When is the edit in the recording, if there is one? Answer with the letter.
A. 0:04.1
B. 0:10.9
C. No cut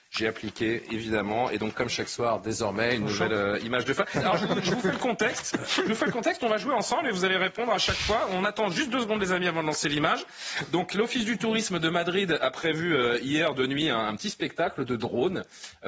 A